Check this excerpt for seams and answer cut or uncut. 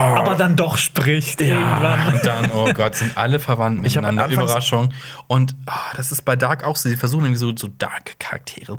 uncut